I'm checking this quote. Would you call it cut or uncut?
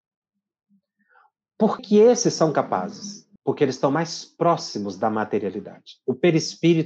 cut